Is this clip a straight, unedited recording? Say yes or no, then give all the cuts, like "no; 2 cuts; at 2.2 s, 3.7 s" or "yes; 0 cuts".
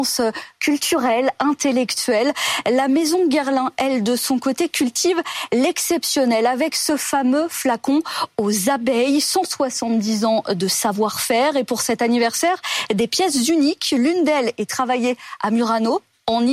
yes; 0 cuts